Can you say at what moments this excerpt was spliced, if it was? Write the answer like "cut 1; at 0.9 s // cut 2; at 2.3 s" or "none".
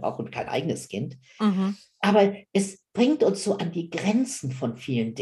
none